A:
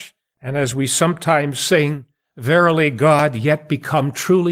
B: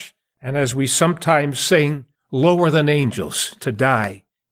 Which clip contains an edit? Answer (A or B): B